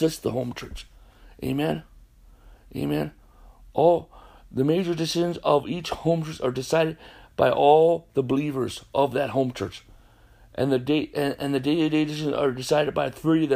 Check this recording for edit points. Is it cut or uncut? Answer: uncut